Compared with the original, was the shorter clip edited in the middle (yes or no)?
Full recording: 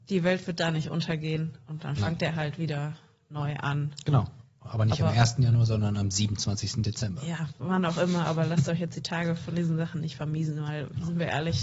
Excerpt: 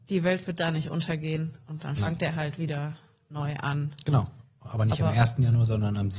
no